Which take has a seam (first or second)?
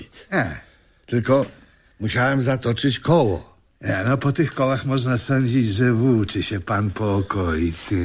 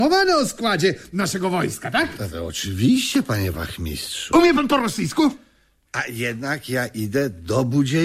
second